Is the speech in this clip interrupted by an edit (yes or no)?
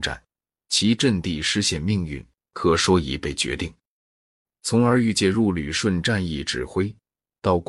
no